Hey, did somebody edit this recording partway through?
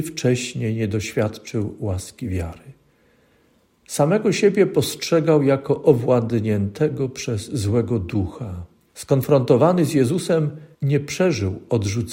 yes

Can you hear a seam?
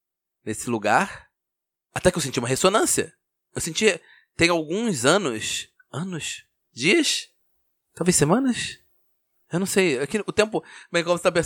no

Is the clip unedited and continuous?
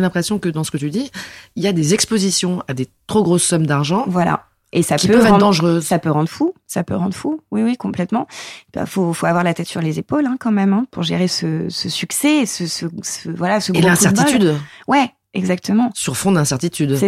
no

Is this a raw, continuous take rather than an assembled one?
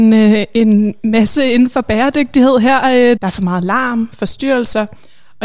no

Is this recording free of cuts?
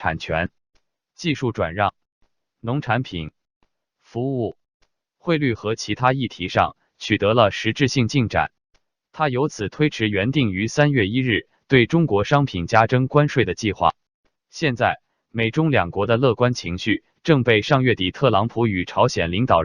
no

